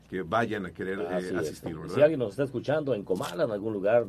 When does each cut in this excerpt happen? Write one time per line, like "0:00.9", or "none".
none